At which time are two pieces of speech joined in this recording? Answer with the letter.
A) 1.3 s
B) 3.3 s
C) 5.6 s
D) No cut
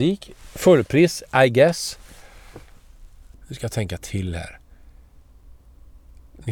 B